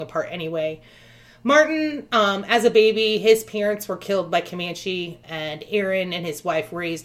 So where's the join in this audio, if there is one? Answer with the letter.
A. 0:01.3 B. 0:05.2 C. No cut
B